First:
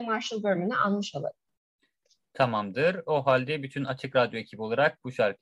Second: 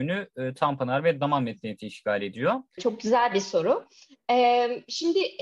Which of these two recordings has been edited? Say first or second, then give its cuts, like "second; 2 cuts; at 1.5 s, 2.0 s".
second; 1 cut; at 2.8 s